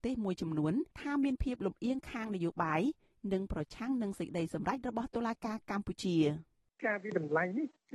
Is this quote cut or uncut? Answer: cut